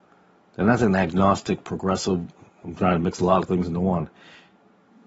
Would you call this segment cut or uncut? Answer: uncut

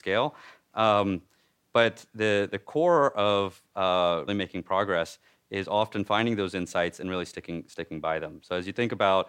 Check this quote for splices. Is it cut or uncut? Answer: cut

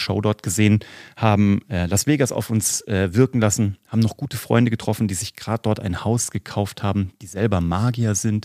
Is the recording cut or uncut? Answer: uncut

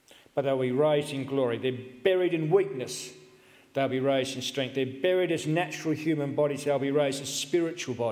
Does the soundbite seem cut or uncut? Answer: uncut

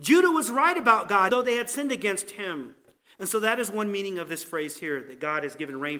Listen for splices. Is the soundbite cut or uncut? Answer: cut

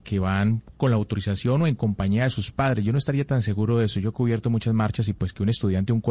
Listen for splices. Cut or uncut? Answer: uncut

